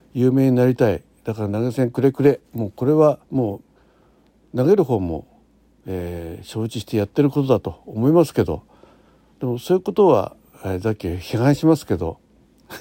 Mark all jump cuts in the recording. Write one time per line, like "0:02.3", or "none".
0:03.2

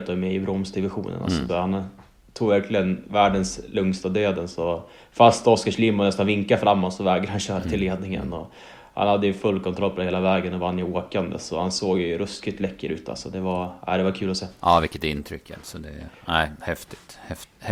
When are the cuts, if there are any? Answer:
0:01.5

